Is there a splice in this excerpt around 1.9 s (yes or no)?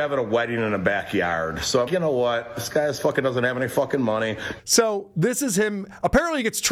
yes